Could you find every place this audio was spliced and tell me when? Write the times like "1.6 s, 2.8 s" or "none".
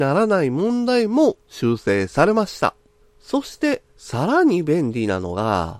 3.0 s